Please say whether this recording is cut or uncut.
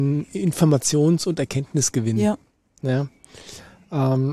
uncut